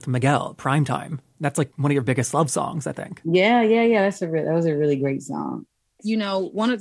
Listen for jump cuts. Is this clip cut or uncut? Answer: uncut